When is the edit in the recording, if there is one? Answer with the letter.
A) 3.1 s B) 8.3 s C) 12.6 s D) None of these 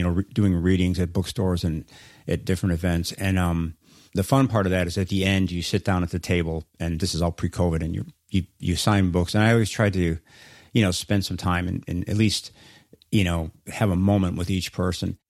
D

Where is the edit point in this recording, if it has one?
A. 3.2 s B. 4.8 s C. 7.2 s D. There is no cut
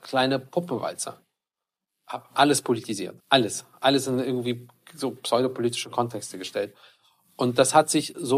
A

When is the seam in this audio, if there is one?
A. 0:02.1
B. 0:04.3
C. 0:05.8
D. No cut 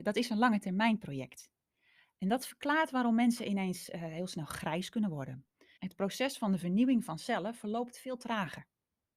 C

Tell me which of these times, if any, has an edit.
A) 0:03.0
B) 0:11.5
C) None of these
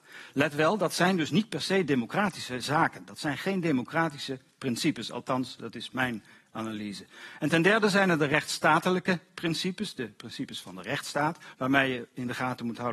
B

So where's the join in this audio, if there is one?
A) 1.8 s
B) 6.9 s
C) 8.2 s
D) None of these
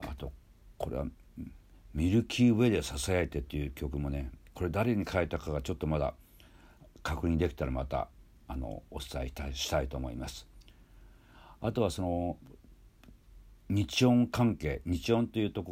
D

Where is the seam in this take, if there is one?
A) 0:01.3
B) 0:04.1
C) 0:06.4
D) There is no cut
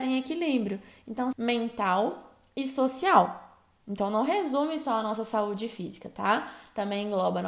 A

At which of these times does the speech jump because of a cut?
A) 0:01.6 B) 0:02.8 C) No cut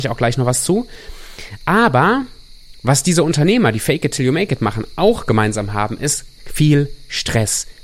C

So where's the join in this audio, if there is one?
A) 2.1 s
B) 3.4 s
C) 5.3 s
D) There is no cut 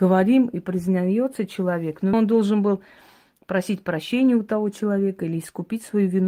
A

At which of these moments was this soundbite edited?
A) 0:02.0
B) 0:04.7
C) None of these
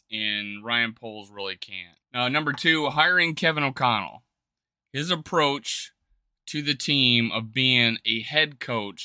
A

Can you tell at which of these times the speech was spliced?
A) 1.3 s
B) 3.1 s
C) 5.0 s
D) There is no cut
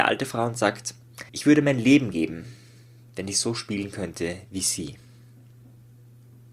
A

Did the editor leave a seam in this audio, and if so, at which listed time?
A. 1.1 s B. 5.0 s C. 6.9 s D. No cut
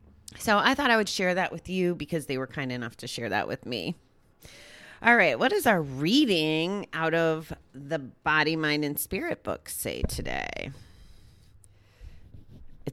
A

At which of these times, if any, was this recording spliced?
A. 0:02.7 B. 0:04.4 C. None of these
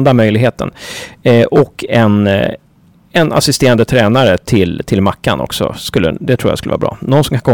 C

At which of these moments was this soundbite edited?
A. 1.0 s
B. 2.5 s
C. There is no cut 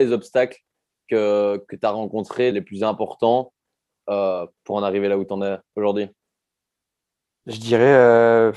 B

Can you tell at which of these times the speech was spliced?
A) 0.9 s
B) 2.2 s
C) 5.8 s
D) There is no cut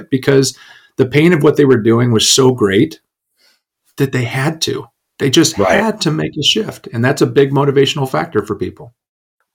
D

